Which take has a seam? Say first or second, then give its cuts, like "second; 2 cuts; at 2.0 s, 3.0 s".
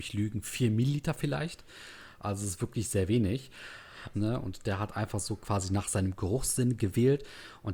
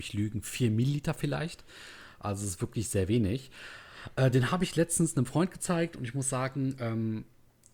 first; 1 cut; at 4.1 s